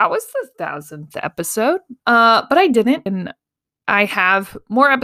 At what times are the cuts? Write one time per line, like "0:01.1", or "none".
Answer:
0:02.0
0:03.1